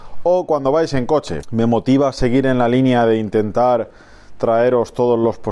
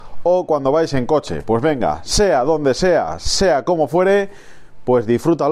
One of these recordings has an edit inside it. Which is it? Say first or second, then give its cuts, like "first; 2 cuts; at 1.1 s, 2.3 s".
first; 1 cut; at 1.4 s